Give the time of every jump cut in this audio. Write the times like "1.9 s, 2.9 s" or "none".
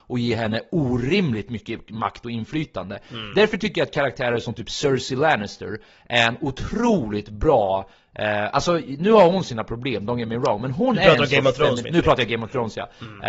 11.8 s